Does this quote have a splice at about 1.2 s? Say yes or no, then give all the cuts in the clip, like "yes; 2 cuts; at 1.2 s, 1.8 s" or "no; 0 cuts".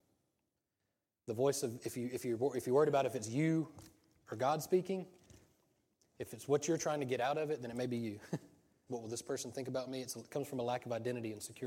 no; 1 cut; at 8.9 s